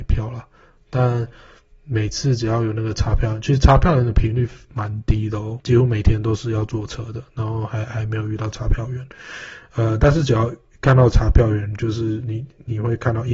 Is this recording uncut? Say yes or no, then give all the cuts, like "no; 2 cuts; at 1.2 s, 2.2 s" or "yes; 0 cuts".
no; 1 cut; at 5.6 s